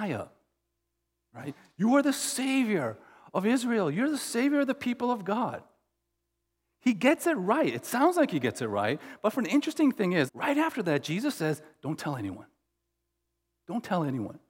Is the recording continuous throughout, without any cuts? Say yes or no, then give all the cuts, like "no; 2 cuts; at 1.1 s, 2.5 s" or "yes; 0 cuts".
no; 1 cut; at 10.3 s